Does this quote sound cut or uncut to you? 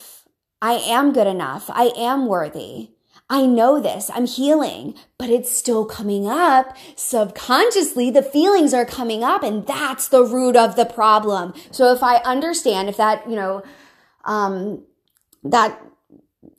cut